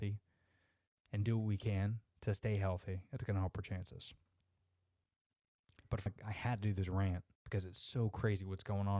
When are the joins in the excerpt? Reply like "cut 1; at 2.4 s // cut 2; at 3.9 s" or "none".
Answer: cut 1; at 6.1 s // cut 2; at 7.3 s